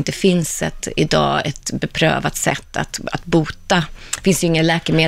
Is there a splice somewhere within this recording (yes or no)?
no